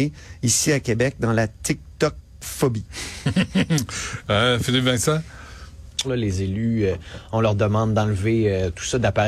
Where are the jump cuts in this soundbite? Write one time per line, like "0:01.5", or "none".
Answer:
0:06.0